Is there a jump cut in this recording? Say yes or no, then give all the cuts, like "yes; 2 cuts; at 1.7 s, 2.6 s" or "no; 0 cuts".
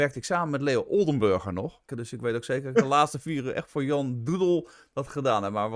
yes; 1 cut; at 1.9 s